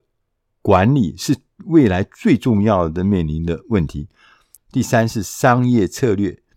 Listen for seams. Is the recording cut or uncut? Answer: cut